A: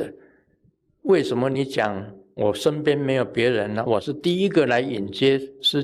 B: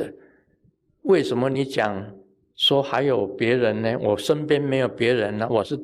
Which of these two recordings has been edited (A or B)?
A